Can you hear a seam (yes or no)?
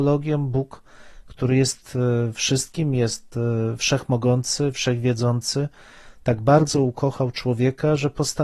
no